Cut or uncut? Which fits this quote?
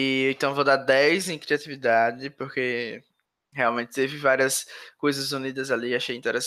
uncut